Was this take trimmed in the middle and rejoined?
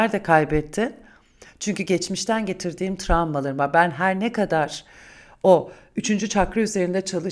no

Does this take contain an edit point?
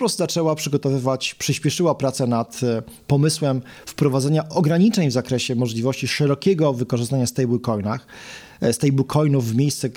no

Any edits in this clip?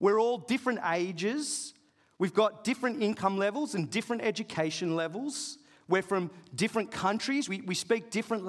no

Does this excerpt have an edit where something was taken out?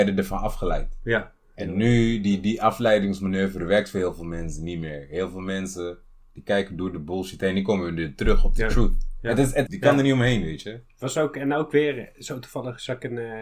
yes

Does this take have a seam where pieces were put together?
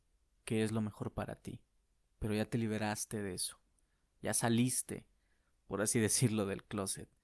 no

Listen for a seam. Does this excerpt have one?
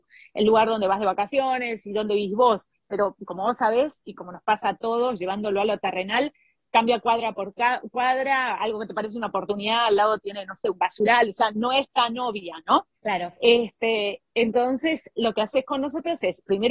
no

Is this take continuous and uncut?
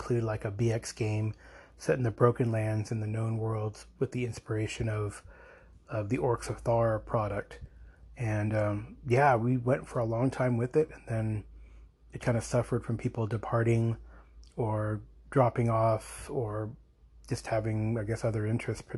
no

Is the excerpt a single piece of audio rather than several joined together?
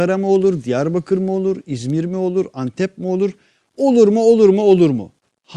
yes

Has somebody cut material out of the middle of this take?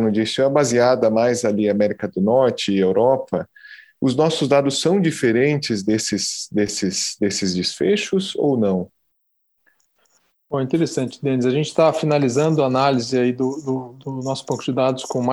no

